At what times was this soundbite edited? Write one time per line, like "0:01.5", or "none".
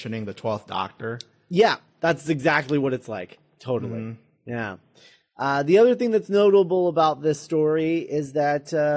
none